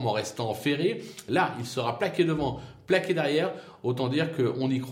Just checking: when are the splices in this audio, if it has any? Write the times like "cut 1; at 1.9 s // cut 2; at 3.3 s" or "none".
none